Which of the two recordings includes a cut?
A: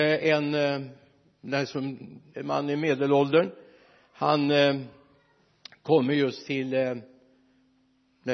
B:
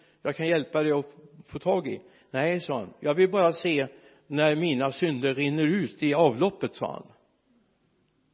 A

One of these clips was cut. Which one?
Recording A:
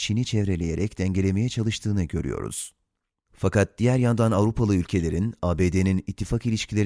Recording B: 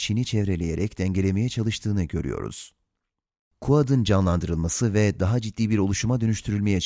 A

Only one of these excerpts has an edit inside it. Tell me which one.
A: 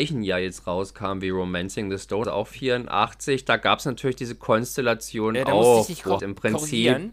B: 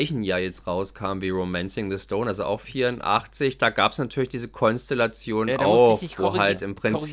A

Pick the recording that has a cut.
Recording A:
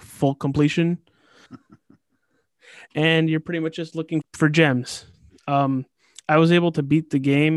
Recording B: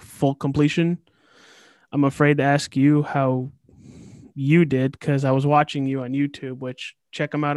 A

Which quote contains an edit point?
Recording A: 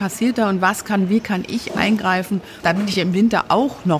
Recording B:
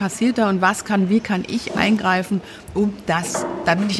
A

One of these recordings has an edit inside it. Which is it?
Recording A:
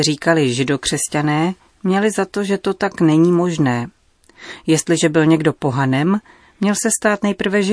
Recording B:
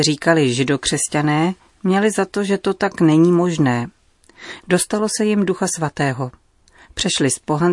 B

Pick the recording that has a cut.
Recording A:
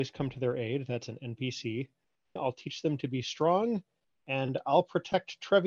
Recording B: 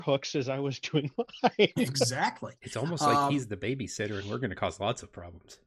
A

